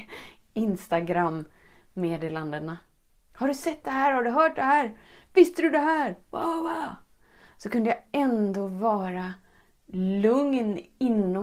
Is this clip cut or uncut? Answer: uncut